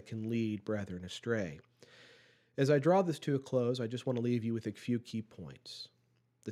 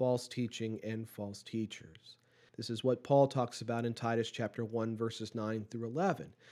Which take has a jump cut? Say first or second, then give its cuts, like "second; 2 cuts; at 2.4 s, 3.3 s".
second; 1 cut; at 2.5 s